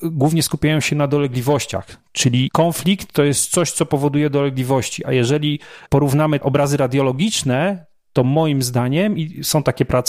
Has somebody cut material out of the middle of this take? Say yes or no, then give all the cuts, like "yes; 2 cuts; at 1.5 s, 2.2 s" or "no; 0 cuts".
no; 0 cuts